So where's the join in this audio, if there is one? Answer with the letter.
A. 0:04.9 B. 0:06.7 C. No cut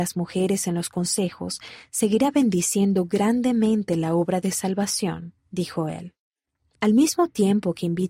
B